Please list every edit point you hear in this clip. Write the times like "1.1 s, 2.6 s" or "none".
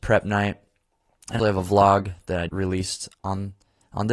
1.4 s, 2.5 s